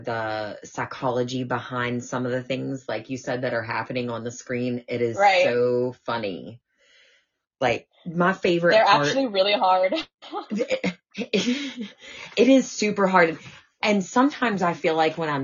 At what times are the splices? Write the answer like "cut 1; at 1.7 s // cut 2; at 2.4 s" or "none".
none

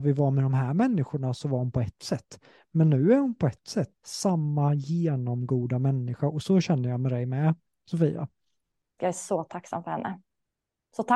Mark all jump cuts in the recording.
cut 1; at 4.0 s // cut 2; at 9.0 s

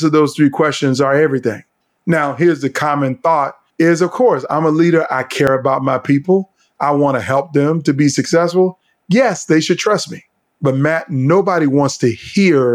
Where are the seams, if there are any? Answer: none

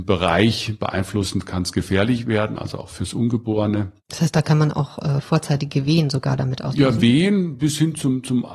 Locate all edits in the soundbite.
cut 1; at 4.0 s

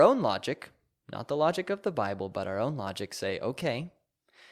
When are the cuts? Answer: none

